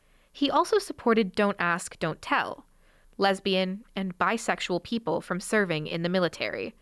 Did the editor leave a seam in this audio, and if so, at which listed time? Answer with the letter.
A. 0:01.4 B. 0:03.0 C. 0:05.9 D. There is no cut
B